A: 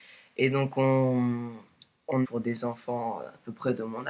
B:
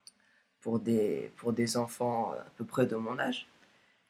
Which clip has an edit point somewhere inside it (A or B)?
A